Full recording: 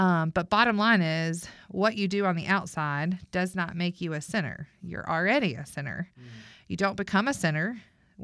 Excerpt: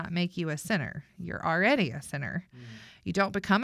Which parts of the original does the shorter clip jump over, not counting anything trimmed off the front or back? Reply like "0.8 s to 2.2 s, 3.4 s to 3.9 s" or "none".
none